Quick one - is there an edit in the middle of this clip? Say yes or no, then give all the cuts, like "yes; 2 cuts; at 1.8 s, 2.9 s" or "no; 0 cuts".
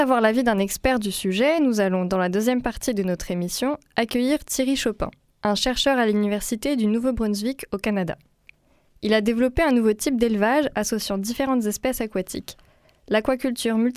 no; 0 cuts